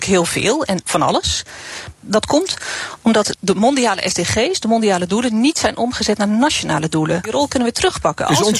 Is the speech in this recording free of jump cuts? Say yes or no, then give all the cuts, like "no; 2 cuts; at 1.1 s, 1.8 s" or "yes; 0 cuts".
no; 3 cuts; at 1.9 s, 3.3 s, 7.2 s